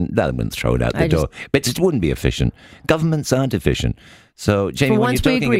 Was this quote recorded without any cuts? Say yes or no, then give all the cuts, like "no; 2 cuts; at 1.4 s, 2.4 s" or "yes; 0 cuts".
yes; 0 cuts